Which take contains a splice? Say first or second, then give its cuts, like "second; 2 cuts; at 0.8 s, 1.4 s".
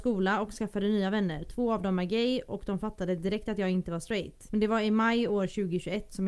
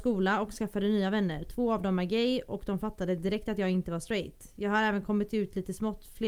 first; 1 cut; at 4.5 s